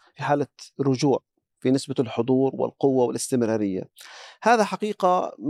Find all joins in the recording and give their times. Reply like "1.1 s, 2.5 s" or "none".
none